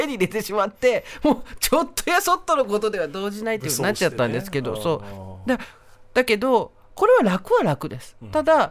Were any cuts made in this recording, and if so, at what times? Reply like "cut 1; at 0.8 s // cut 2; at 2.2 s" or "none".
none

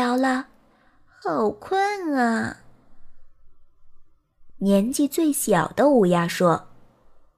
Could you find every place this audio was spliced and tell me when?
none

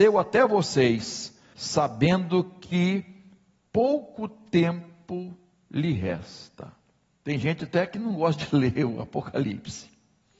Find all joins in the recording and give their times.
cut 1; at 1.5 s // cut 2; at 7.1 s

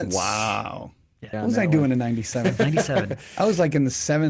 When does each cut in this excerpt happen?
cut 1; at 1.3 s

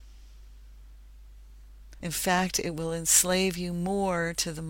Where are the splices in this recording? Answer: cut 1; at 2.0 s

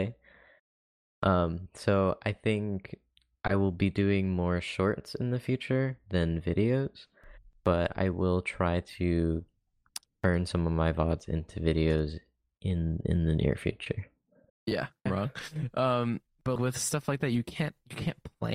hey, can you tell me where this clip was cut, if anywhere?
cut 1; at 15.1 s // cut 2; at 16.6 s

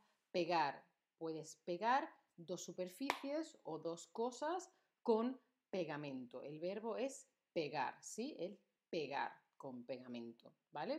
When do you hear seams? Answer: none

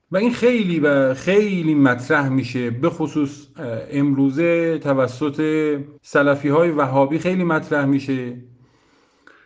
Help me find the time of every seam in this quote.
cut 1; at 6.0 s

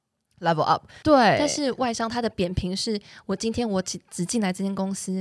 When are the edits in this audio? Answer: cut 1; at 1.0 s

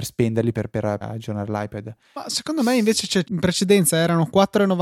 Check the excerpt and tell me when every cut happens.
cut 1; at 1.0 s // cut 2; at 3.2 s

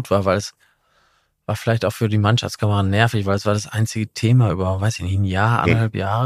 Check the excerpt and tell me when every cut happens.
none

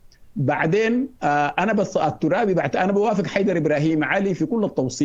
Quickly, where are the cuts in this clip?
cut 1; at 1.2 s

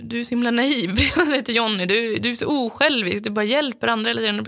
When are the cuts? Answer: none

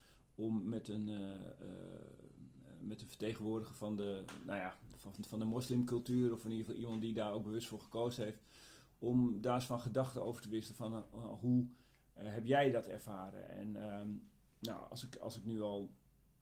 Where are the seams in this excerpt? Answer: none

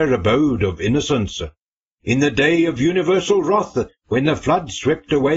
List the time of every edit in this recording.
none

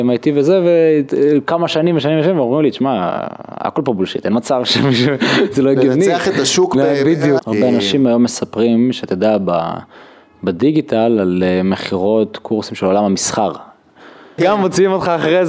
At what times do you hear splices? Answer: cut 1; at 7.4 s // cut 2; at 14.4 s

